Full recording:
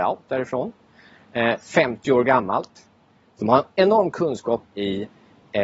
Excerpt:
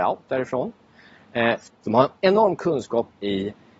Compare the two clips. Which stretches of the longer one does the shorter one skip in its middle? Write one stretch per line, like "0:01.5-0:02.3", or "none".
0:01.7-0:03.2